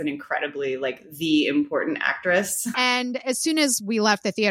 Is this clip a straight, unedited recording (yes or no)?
no